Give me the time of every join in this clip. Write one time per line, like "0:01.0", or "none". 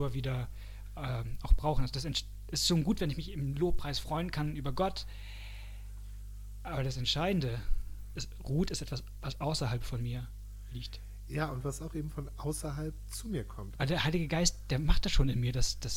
0:08.2
0:13.8

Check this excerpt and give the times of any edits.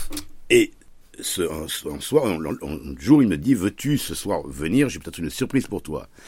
none

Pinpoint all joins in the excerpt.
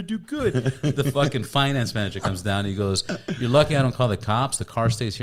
none

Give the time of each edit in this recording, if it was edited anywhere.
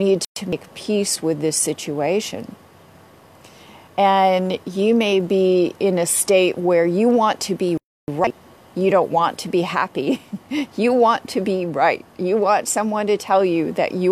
0:03.9

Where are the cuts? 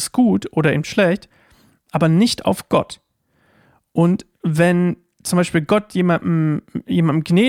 none

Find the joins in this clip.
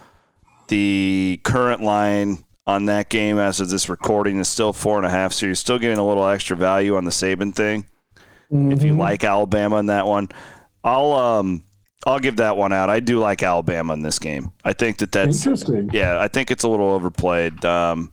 none

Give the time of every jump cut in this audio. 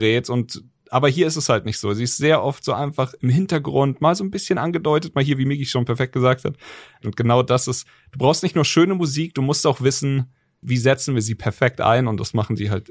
0:07.0
0:10.6

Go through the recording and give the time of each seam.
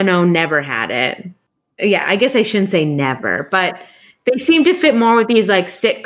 none

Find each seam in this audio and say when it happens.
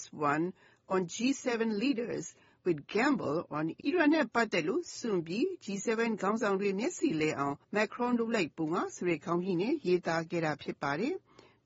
0:03.8
0:07.6

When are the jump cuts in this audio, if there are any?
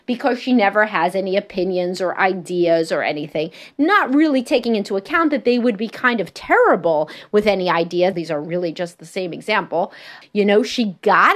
0:08.1
0:10.2

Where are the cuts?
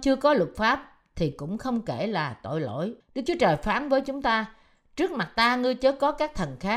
0:03.0

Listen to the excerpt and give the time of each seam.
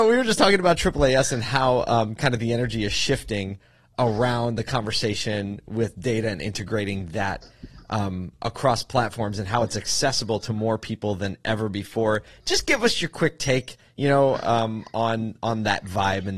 none

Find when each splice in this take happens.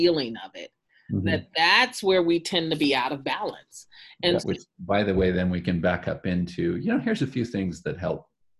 0:04.4

